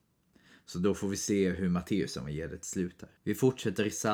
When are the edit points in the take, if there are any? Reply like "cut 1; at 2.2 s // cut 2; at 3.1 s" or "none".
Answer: cut 1; at 3.2 s